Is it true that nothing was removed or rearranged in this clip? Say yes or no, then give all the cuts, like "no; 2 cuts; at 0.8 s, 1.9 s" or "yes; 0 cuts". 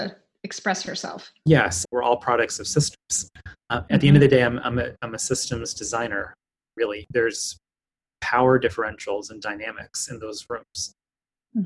no; 1 cut; at 1.8 s